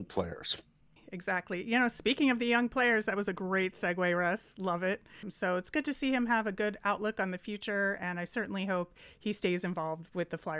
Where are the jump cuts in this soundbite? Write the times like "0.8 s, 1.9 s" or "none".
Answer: 5.2 s